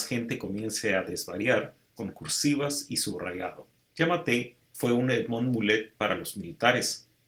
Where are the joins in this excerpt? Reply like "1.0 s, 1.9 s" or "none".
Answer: 2.0 s, 3.9 s

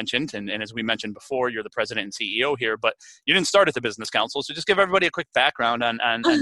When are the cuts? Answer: none

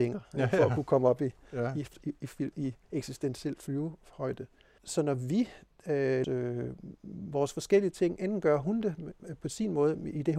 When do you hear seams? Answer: 6.2 s

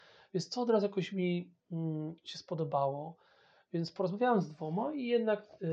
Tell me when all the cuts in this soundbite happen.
none

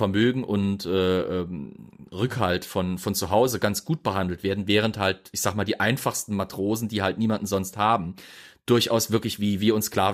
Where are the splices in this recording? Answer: none

